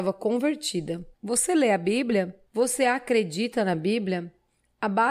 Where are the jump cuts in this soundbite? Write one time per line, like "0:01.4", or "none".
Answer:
0:01.1